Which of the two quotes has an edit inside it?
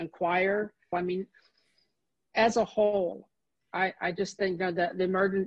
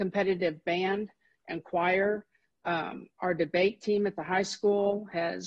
first; 2 cuts; at 0.9 s, 3.6 s

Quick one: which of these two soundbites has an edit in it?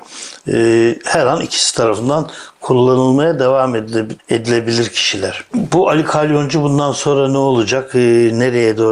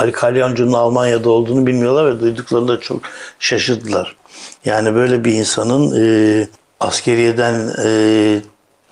second; 1 cut; at 4.6 s

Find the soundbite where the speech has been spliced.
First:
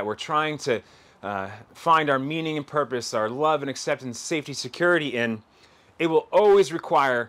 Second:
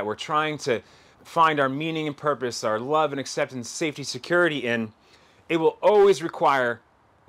second; 1 cut; at 1.1 s

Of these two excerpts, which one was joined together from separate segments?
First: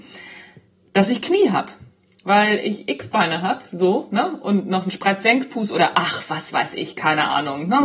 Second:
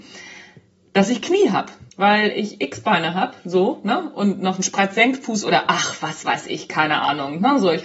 second; 1 cut; at 1.9 s

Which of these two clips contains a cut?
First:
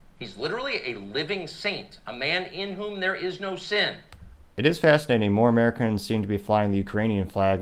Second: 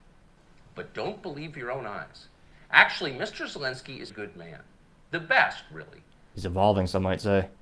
second; 2 cuts; at 4.1 s, 6.3 s

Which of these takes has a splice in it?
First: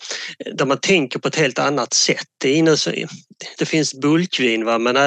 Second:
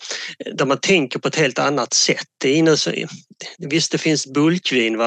first; 1 cut; at 3.6 s

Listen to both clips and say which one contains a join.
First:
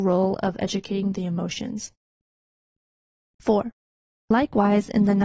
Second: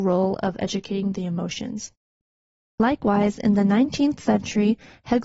second; 1 cut; at 2.7 s

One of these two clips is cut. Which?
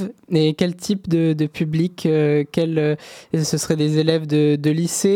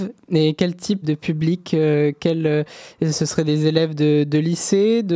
second; 1 cut; at 1.0 s

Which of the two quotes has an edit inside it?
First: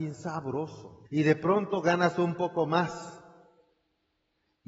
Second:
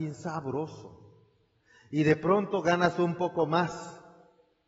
first; 1 cut; at 1.1 s

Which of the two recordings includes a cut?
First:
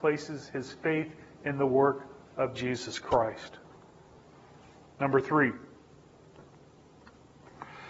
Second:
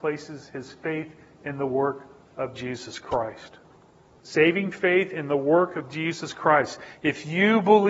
second; 1 cut; at 4.2 s

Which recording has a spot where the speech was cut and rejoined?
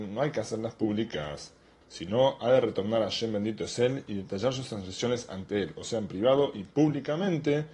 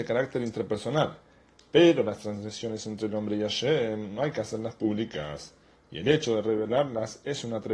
first; 1 cut; at 1.8 s

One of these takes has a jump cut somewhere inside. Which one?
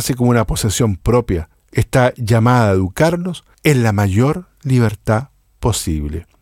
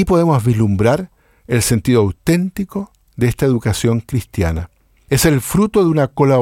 first; 1 cut; at 1.5 s

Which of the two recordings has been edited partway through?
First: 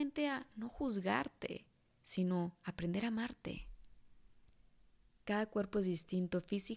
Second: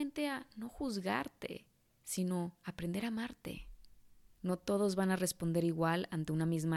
second; 1 cut; at 4.3 s

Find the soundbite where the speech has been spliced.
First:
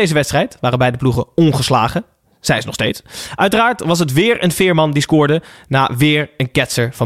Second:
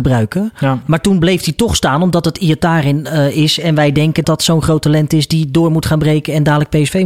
second; 1 cut; at 4.2 s

